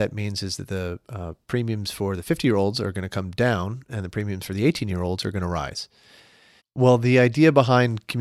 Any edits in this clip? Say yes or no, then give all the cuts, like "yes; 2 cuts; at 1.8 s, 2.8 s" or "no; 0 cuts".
yes; 1 cut; at 6.6 s